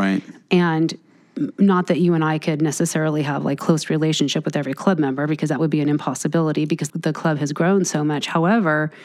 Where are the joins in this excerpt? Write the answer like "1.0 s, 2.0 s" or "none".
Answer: 3.6 s, 6.9 s